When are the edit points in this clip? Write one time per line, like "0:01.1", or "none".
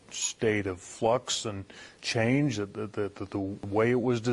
none